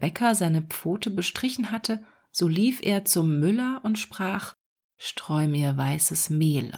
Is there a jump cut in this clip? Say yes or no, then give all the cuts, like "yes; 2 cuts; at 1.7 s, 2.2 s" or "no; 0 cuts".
no; 0 cuts